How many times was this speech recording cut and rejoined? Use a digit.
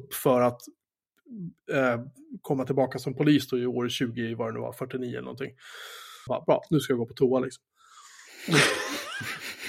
1